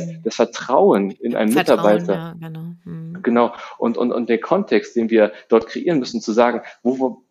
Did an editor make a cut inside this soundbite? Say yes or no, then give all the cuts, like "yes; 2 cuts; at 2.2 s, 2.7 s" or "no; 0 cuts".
no; 0 cuts